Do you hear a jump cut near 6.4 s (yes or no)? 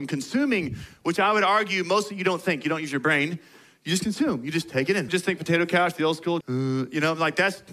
yes